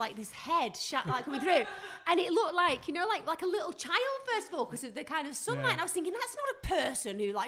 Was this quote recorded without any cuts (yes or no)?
yes